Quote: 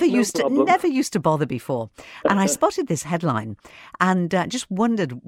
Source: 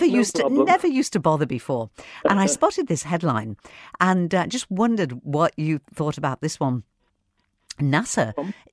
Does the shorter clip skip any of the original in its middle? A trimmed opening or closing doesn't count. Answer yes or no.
no